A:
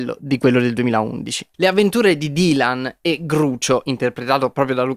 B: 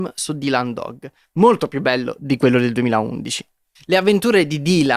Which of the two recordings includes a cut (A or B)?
A